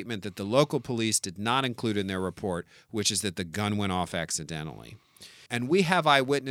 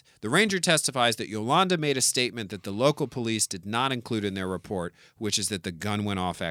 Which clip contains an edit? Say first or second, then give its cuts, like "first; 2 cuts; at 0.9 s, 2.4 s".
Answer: first; 1 cut; at 5.5 s